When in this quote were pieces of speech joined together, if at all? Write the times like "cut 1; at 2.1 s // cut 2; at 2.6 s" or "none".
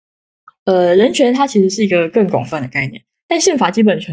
none